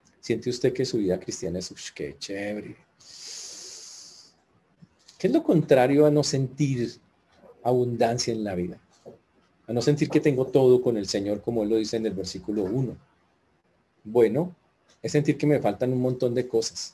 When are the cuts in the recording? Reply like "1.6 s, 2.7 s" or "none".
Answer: none